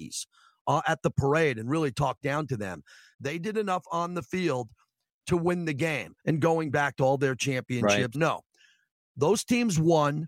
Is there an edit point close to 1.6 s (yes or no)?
no